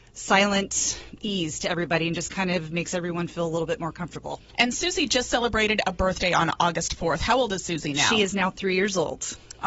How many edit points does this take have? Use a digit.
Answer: 0